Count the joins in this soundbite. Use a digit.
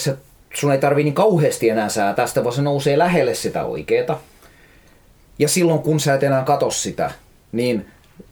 0